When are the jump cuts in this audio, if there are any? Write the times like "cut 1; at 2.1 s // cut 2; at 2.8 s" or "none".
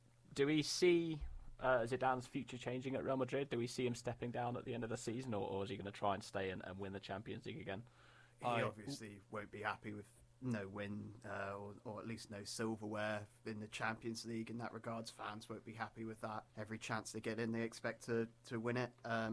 cut 1; at 8.3 s // cut 2; at 16.5 s